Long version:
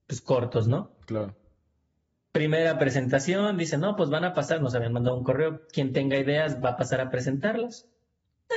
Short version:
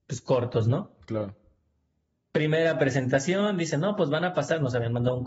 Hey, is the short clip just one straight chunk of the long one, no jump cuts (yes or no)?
yes